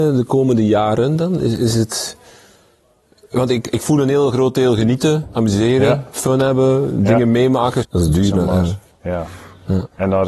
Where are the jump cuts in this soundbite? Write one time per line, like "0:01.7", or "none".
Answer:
0:07.8

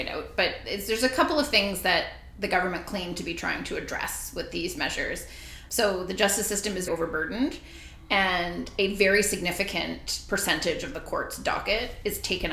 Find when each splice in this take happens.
0:05.7
0:06.9

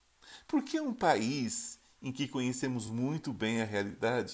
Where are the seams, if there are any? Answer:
none

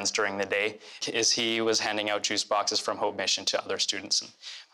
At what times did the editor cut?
0:01.0

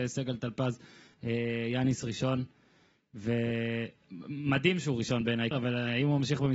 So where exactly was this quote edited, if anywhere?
0:05.5

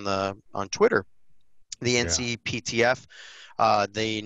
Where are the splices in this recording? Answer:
none

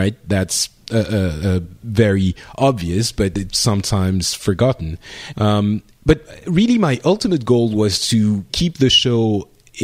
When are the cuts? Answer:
0:05.3
0:08.5

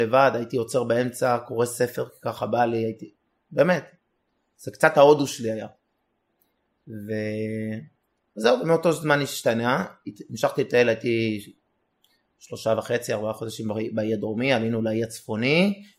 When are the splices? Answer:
none

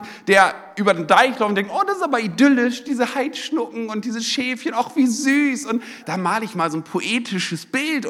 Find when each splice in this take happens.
0:06.0

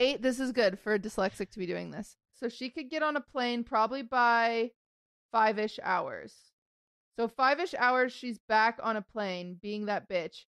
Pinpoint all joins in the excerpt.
0:02.3

